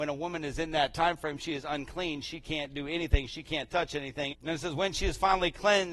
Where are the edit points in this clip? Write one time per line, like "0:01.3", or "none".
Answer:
0:04.3